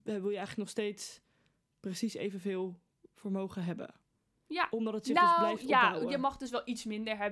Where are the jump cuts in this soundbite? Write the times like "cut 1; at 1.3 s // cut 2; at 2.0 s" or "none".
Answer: none